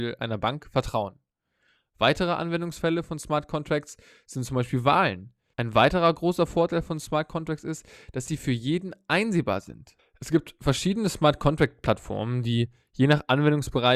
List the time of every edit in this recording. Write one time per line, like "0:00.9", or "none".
0:05.5
0:10.0